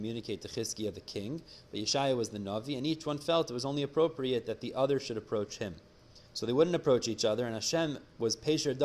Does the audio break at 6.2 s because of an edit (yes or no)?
yes